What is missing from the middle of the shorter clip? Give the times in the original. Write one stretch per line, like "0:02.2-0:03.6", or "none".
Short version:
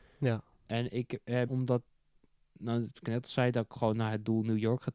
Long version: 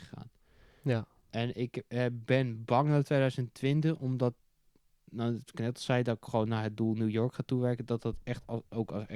0:02.1-0:04.0